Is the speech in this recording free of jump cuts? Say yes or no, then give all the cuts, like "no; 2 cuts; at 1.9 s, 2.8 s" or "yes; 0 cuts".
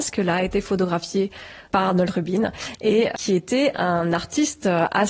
no; 1 cut; at 3.1 s